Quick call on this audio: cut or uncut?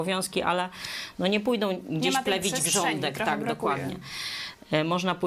uncut